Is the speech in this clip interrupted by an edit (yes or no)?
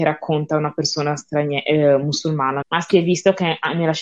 yes